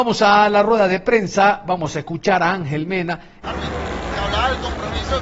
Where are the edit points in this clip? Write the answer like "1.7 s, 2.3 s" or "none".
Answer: 3.4 s